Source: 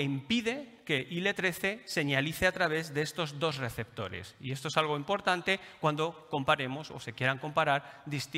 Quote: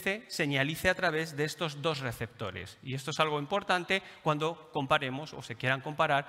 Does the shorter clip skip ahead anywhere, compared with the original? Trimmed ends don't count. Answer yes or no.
no